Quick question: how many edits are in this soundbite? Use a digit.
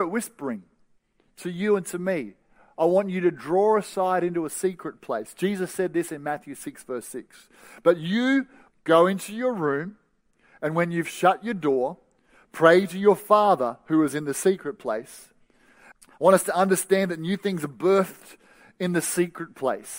2